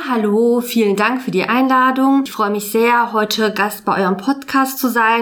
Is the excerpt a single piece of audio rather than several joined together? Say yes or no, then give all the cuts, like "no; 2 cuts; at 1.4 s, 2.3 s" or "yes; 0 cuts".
yes; 0 cuts